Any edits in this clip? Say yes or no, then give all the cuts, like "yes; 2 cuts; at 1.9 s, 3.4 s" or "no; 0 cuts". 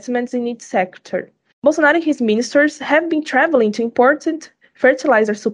yes; 1 cut; at 1.5 s